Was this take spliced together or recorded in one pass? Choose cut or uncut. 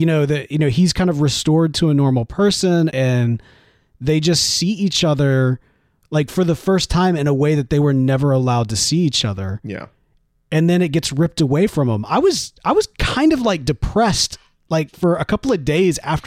cut